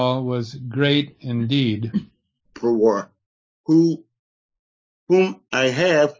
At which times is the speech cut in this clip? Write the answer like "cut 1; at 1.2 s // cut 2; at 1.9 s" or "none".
cut 1; at 2.5 s